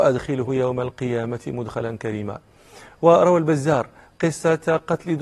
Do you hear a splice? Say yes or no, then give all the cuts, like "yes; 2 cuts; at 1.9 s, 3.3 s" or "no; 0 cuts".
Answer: no; 0 cuts